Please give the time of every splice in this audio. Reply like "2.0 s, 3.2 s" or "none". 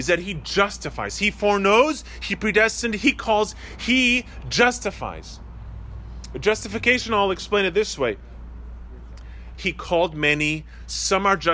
9.5 s